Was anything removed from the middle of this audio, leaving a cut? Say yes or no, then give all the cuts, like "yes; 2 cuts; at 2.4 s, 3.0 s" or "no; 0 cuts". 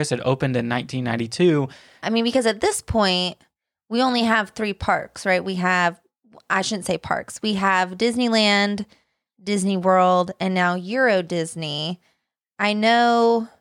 yes; 1 cut; at 2.0 s